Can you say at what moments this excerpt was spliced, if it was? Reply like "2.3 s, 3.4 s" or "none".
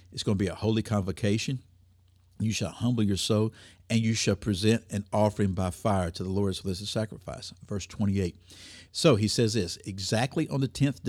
8.9 s